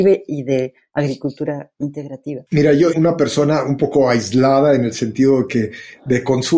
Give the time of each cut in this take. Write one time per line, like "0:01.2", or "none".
0:02.9